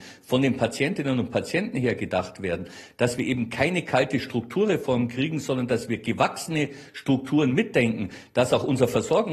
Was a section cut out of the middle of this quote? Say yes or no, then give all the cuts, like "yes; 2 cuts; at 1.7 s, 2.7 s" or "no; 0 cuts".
no; 0 cuts